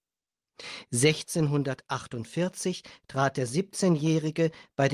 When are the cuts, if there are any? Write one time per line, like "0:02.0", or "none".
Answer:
none